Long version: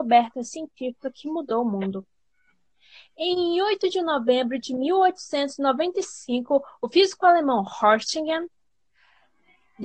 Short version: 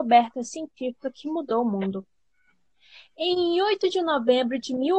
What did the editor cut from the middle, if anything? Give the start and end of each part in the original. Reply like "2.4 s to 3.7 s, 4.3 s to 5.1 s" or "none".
none